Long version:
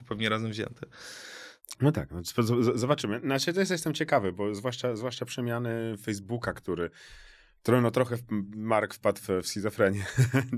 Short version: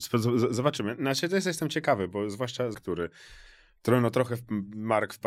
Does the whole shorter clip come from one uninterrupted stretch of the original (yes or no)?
no